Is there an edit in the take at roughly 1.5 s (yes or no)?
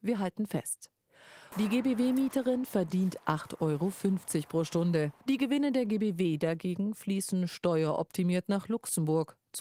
yes